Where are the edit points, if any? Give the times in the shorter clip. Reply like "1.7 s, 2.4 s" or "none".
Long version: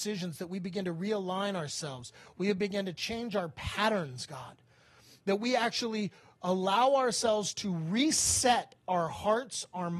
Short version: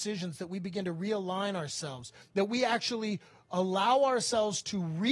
2.2 s

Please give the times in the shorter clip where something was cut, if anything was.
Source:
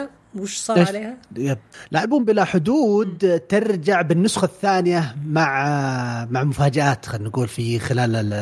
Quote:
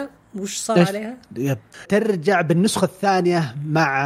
1.9 s

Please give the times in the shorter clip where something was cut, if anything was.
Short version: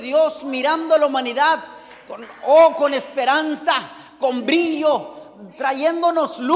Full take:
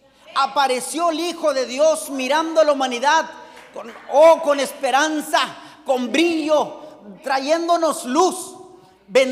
none

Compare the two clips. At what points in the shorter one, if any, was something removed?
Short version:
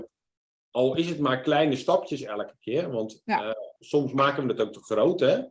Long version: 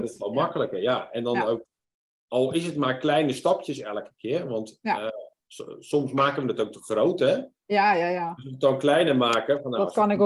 3.8 s

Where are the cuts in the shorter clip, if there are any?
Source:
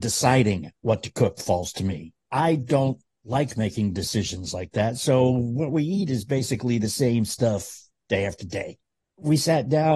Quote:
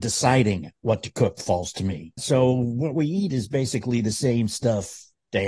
2.2 s

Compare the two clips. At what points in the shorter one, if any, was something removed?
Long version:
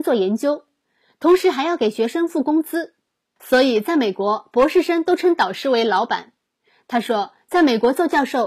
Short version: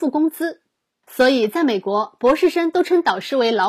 none

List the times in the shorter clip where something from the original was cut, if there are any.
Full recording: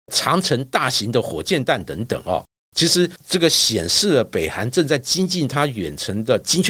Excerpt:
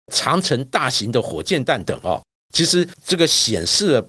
1.8 s

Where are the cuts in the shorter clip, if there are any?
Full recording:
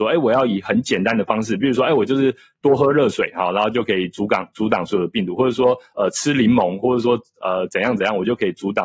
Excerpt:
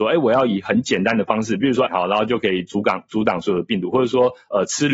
1.9 s

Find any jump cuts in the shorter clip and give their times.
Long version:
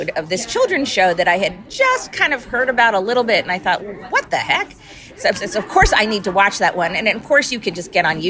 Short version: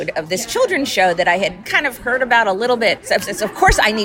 1.6 s, 3.0 s

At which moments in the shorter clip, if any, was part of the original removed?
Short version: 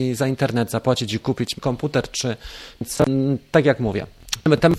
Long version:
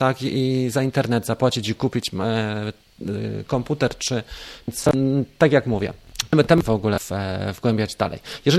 1.6 s

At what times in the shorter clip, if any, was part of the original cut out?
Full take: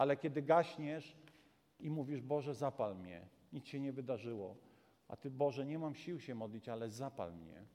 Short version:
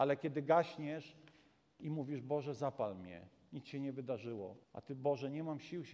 4.6 s

